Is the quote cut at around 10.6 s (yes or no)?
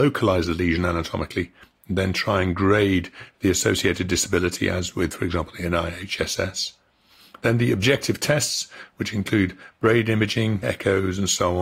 yes